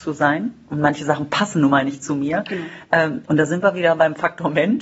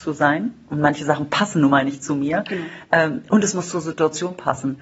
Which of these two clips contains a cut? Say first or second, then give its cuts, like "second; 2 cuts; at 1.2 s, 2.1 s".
first; 1 cut; at 3.3 s